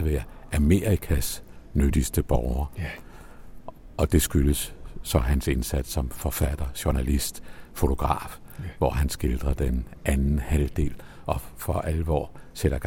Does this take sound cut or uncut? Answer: uncut